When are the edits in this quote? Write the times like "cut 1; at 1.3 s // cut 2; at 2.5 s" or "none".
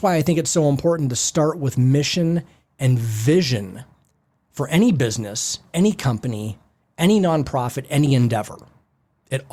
none